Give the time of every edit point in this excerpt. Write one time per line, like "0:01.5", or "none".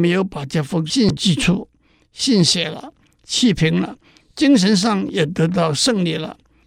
none

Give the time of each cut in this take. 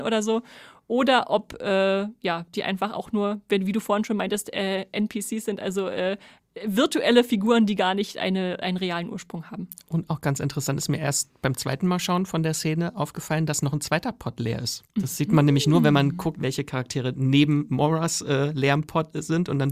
0:14.9

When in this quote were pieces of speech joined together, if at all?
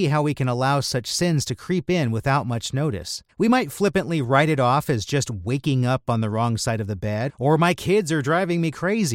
0:03.3
0:07.3

